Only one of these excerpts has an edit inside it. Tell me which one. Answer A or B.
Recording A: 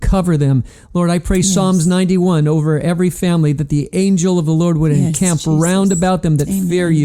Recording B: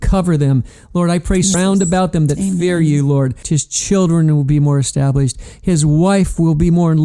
B